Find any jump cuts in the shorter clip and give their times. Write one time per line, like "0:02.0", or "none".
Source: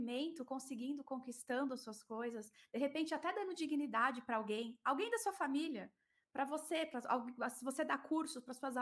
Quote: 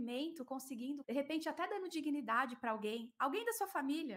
0:01.0